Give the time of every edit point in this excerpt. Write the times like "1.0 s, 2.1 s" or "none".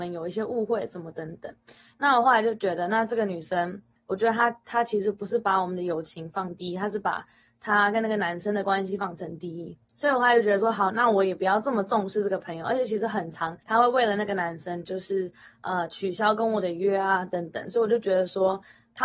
none